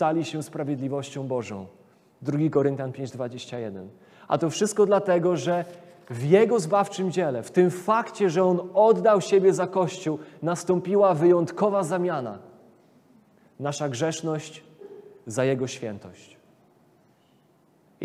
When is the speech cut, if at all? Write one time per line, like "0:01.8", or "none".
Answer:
none